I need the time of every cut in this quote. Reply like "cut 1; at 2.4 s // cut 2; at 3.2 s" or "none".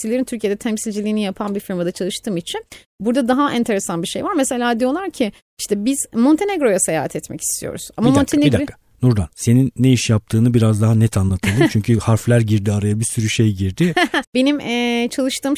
cut 1; at 9.3 s // cut 2; at 14.2 s